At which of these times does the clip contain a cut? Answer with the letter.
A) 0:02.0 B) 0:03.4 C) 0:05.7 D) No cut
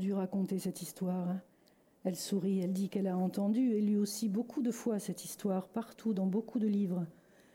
D